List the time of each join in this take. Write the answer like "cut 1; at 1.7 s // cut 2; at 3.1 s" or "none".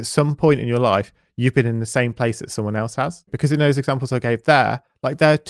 cut 1; at 3.3 s